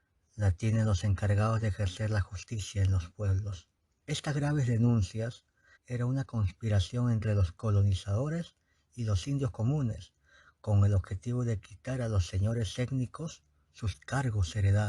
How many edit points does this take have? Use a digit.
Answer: 2